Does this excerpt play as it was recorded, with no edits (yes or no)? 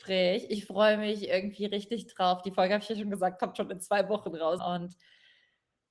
no